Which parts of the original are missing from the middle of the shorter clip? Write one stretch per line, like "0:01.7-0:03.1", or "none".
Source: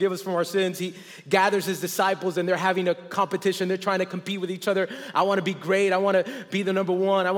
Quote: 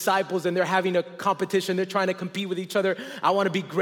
none